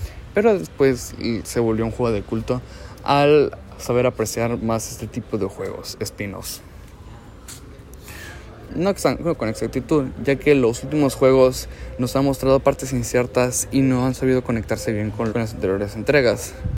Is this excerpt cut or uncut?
cut